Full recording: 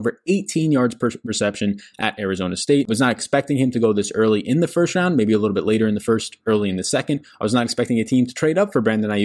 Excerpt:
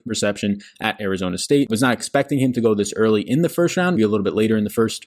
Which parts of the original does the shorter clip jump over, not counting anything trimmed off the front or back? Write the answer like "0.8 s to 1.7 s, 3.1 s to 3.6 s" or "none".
5.1 s to 5.3 s